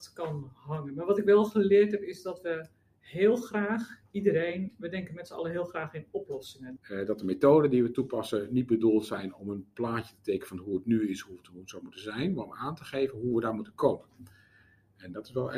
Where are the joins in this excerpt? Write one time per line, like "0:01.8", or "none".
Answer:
0:06.8